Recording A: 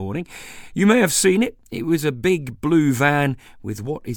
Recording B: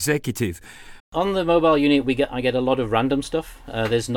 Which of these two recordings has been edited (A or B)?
B